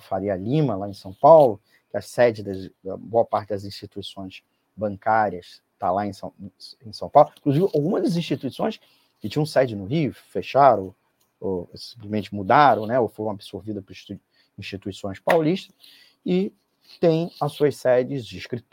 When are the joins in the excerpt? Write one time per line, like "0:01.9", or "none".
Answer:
none